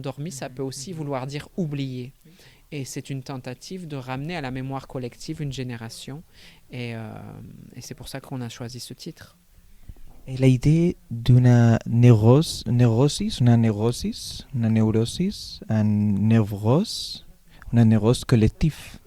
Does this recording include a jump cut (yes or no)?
no